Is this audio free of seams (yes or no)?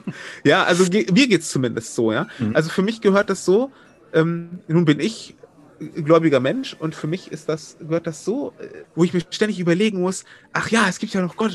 no